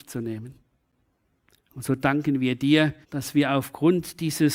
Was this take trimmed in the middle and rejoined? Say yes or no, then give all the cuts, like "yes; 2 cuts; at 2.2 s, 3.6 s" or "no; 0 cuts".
yes; 2 cuts; at 1.6 s, 3.0 s